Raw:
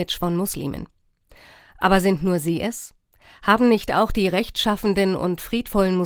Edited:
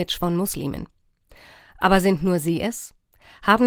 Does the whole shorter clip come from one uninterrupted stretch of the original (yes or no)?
yes